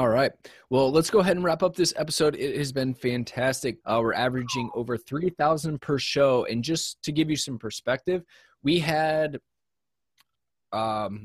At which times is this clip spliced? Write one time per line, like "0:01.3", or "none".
0:03.8